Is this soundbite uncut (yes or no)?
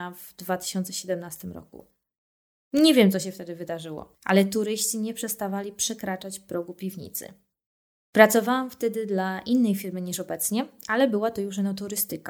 yes